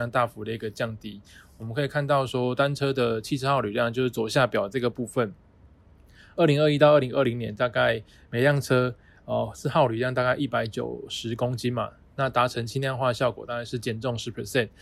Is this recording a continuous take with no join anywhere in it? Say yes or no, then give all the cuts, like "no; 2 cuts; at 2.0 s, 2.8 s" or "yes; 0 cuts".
yes; 0 cuts